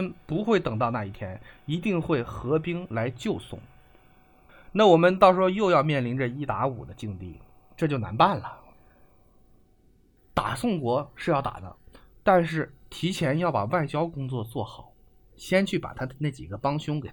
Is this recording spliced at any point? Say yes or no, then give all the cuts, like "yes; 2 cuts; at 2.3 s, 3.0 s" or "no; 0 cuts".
no; 0 cuts